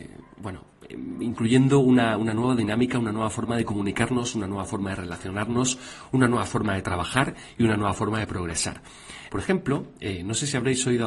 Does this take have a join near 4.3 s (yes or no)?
no